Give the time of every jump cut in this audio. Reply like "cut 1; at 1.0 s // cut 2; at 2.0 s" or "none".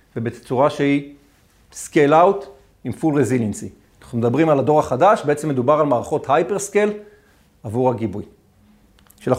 cut 1; at 3.9 s